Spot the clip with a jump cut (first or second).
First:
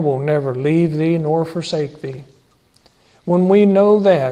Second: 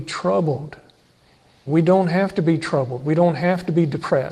second